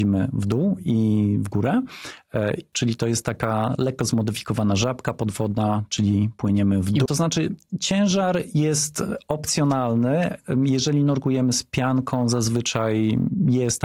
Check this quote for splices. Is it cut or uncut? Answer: cut